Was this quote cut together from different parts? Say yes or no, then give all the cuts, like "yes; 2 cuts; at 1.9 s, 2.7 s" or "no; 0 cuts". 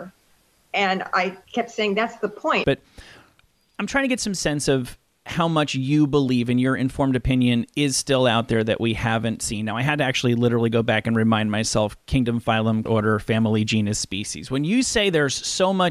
yes; 2 cuts; at 2.6 s, 12.9 s